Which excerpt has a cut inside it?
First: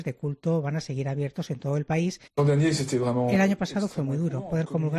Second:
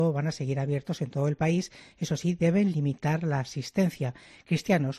first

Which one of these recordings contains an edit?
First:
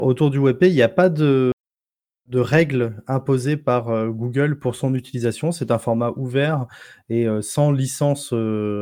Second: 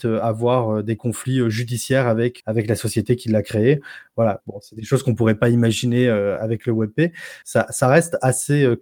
second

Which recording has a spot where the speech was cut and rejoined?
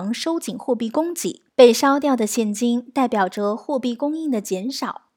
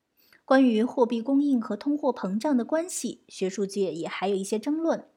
first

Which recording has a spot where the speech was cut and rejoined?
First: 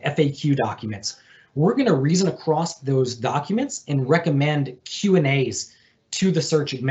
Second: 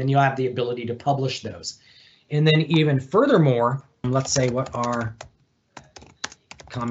second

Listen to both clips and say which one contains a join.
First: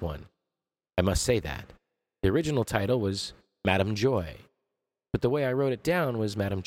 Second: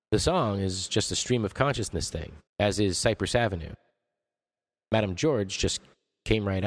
second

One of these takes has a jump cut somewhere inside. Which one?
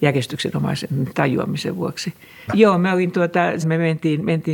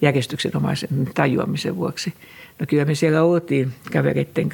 first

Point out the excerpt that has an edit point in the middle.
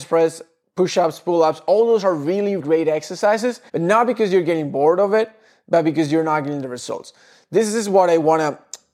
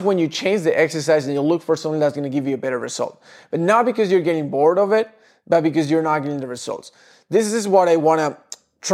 first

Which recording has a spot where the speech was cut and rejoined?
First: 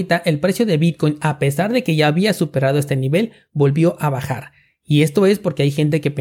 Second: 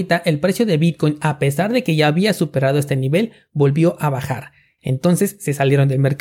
second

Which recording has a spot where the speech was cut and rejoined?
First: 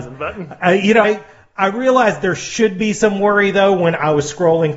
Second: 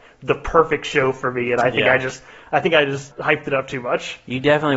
first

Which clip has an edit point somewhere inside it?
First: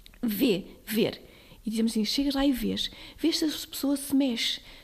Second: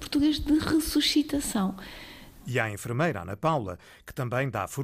second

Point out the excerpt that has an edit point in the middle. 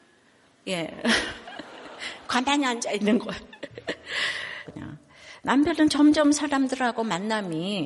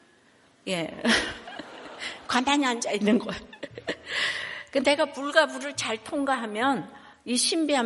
first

